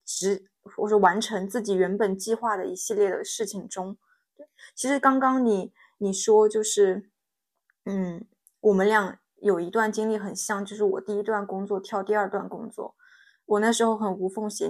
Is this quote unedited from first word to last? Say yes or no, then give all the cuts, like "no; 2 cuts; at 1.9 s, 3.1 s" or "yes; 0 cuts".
yes; 0 cuts